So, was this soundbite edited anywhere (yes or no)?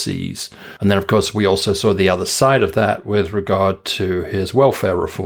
no